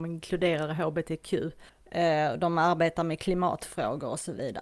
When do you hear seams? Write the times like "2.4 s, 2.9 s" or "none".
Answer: none